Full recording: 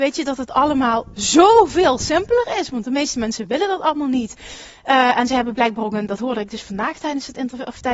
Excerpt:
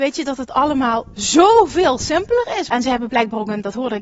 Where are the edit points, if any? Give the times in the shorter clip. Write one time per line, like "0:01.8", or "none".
0:02.7